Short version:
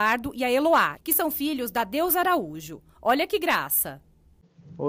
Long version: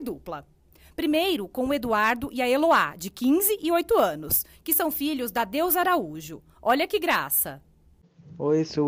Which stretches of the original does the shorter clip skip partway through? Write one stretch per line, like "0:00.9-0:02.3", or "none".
0:02.9-0:04.6